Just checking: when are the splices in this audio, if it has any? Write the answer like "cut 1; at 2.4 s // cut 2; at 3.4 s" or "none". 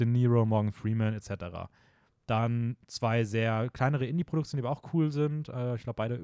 none